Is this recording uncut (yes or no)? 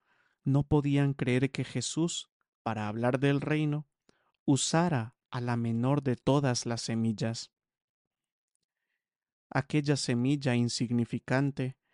yes